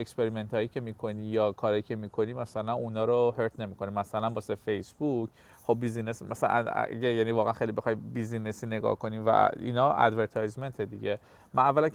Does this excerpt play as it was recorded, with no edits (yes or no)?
yes